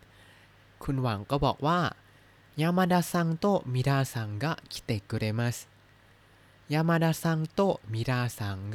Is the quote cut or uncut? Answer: uncut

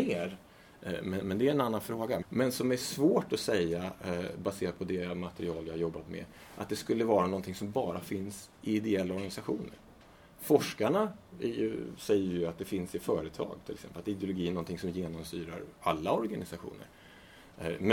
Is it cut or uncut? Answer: cut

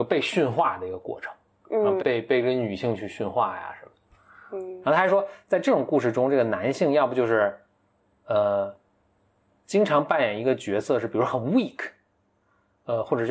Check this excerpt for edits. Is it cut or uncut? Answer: cut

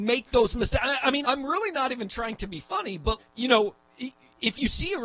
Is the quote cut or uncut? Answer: cut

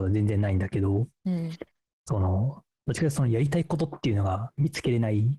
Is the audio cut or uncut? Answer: uncut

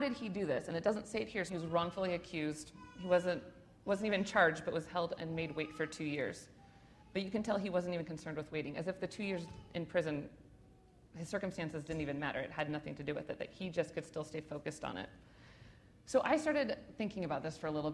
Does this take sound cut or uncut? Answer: cut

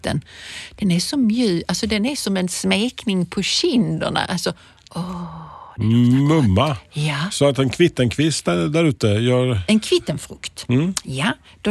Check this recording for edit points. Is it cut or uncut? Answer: uncut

